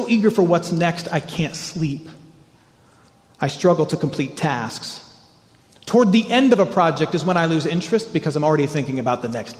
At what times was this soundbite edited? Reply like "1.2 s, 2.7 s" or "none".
none